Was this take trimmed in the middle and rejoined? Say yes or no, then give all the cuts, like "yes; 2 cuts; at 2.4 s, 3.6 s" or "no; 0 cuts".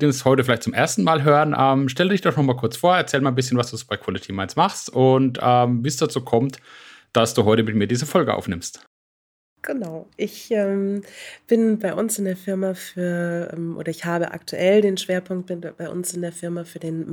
no; 0 cuts